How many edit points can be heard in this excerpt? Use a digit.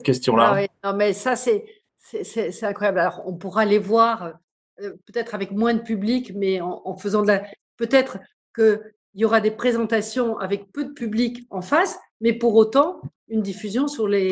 1